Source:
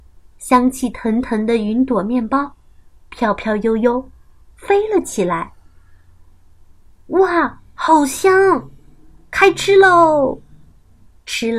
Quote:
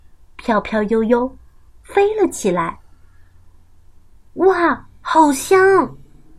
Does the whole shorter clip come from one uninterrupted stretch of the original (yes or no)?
yes